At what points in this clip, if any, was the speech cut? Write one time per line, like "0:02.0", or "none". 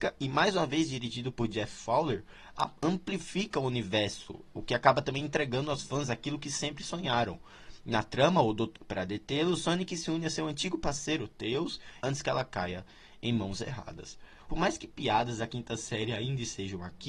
0:08.7
0:12.0
0:14.5